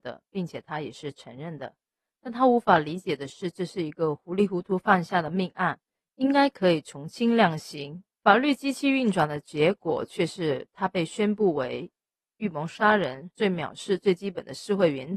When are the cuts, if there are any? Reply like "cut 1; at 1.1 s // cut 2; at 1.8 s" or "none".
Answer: cut 1; at 8.1 s // cut 2; at 13.3 s